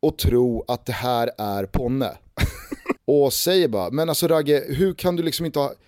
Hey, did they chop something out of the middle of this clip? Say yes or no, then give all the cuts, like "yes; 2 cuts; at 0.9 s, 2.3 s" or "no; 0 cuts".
yes; 2 cuts; at 3.0 s, 4.7 s